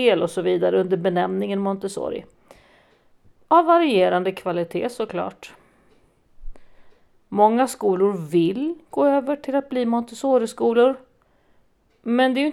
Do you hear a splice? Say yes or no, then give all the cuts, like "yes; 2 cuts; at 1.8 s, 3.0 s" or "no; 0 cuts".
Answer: no; 0 cuts